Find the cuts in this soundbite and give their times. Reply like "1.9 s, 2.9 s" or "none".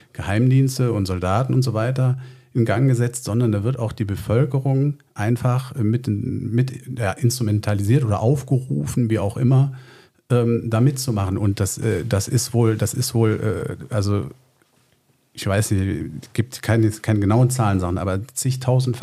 none